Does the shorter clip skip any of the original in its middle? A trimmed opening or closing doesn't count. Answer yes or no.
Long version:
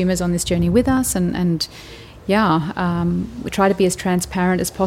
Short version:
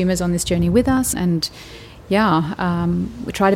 yes